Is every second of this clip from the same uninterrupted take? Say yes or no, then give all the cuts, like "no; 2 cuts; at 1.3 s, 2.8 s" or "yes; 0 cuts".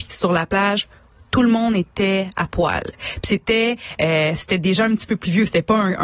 yes; 0 cuts